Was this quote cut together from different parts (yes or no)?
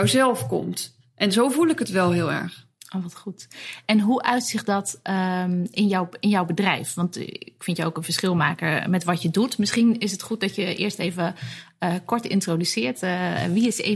no